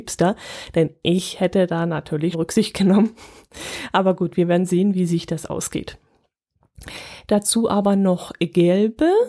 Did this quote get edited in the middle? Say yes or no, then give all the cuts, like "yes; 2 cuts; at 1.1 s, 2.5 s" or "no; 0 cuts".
yes; 2 cuts; at 2.3 s, 7.3 s